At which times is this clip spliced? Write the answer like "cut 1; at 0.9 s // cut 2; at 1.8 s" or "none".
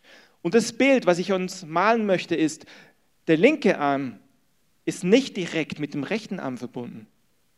none